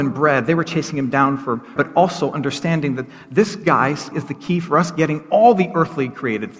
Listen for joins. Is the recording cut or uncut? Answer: cut